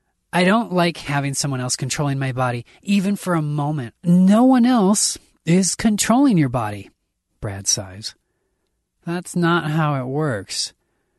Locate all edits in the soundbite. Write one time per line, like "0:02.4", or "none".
0:03.9

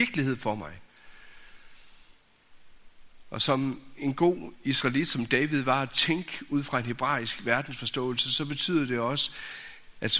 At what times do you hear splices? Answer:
none

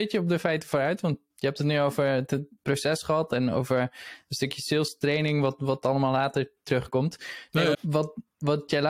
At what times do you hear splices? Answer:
0:07.7

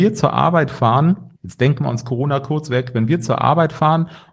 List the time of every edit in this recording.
0:01.4

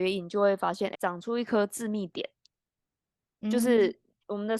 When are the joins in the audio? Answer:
0:00.9

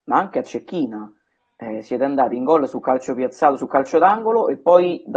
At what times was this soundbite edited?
none

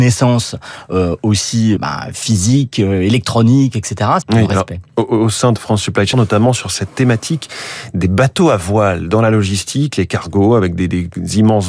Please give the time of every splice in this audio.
0:01.8
0:04.2
0:06.1

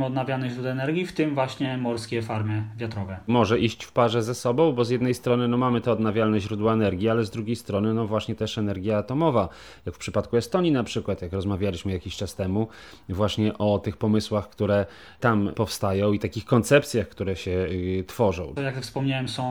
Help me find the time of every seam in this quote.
0:18.6

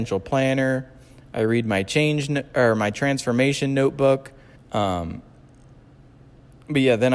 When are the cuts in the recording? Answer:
0:04.6

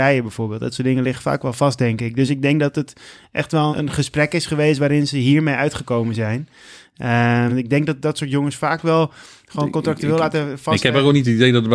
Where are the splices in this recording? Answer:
0:03.7
0:07.5

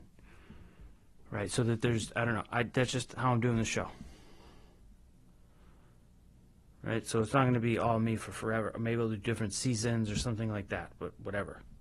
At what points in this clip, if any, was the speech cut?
none

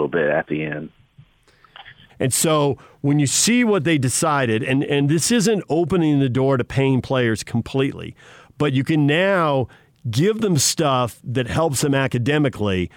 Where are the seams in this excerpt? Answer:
0:02.1

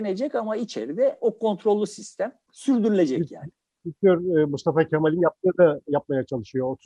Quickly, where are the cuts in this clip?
none

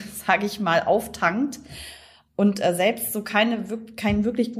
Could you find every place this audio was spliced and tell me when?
none

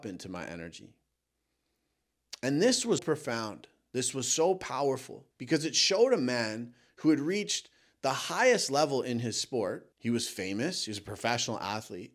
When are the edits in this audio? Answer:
0:03.0
0:05.3
0:09.9

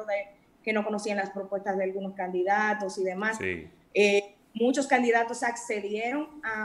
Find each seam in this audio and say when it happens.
none

